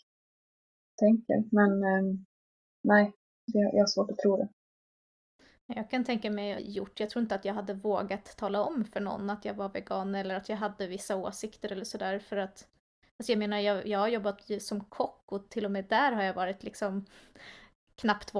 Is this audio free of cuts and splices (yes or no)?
no